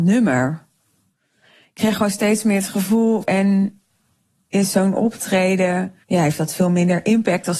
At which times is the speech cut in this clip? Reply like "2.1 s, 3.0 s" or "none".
3.2 s, 6.0 s